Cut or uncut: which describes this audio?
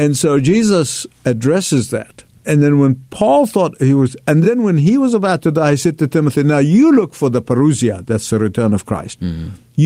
uncut